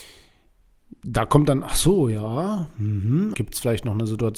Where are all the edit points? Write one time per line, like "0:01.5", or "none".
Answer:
0:03.3